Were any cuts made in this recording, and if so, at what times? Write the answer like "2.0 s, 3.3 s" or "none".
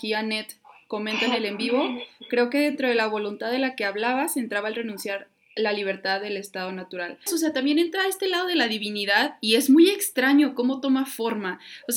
7.3 s